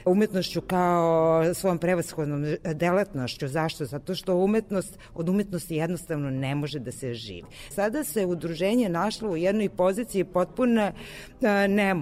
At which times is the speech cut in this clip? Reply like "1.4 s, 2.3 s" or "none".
7.7 s